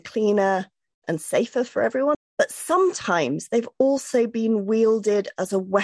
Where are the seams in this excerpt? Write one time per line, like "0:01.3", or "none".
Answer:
0:02.1